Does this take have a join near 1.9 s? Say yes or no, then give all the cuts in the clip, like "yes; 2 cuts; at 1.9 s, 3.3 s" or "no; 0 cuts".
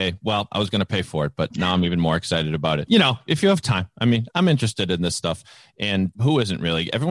no; 0 cuts